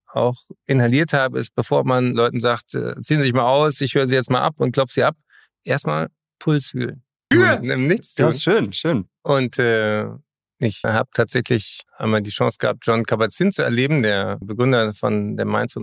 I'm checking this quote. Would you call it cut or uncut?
cut